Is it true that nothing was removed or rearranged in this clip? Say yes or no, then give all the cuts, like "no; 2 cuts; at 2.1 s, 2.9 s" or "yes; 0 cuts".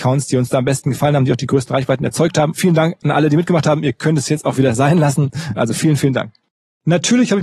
no; 2 cuts; at 2.5 s, 5.6 s